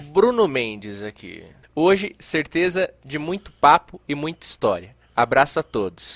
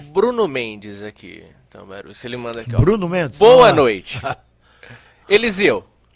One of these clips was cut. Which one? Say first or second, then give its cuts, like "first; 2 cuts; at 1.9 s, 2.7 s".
first; 1 cut; at 1.6 s